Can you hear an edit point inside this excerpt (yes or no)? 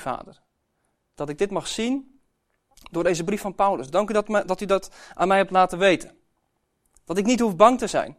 no